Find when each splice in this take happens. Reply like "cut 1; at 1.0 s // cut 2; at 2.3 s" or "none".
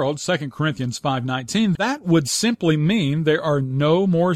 cut 1; at 1.8 s